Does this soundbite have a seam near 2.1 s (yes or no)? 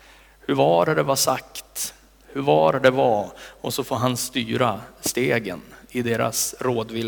no